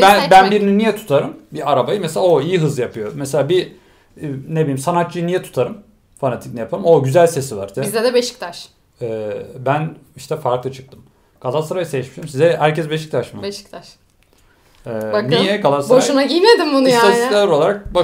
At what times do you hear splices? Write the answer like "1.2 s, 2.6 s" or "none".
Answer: 7.7 s